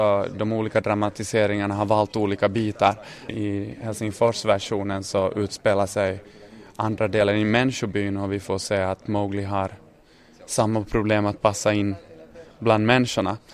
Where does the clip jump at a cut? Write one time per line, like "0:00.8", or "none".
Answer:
0:03.3